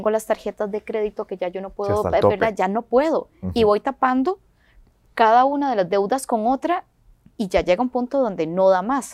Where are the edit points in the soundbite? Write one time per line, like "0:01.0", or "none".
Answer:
none